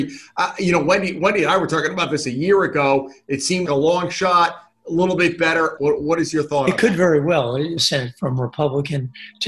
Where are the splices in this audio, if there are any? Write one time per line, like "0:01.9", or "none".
0:03.7
0:05.8
0:07.8